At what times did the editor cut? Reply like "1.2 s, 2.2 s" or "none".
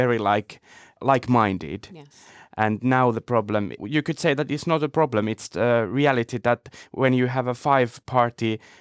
3.8 s, 5.5 s